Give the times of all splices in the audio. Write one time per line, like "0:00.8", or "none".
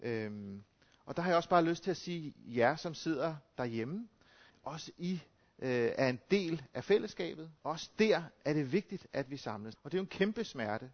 0:04.5
0:07.6
0:09.8